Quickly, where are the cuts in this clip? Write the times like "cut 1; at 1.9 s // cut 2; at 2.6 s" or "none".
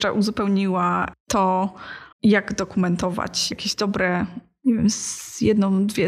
cut 1; at 2.1 s // cut 2; at 3.5 s